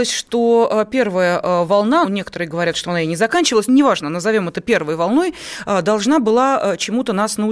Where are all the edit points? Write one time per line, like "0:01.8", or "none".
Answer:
0:02.0
0:03.7